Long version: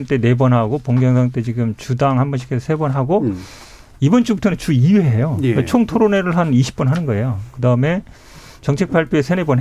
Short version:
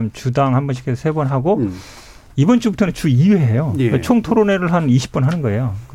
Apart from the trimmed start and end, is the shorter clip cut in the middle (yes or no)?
no